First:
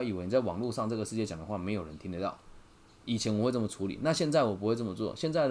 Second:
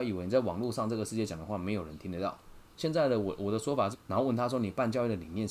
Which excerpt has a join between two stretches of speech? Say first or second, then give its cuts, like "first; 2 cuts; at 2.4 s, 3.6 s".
second; 2 cuts; at 2.8 s, 3.9 s